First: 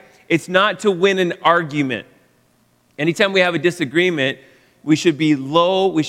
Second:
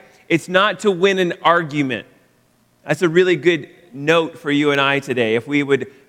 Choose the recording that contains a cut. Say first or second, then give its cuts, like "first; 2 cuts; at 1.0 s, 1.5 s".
second; 1 cut; at 2.8 s